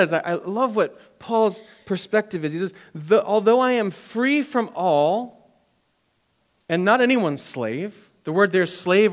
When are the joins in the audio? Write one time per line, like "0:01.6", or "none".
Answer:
none

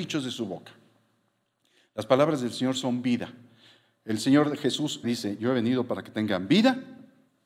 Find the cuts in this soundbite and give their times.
0:05.0

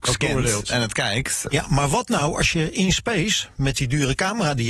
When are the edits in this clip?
0:01.5

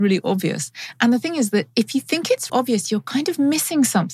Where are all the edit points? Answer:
0:02.5

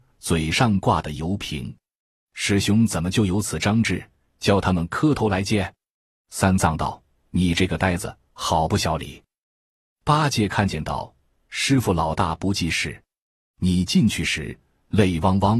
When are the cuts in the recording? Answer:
0:09.7

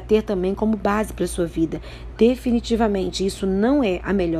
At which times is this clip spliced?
none

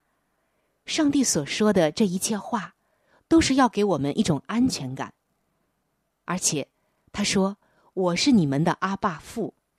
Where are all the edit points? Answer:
none

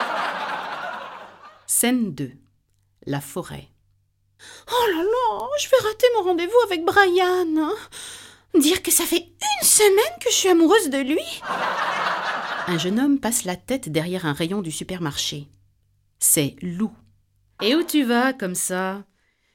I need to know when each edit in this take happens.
0:17.6

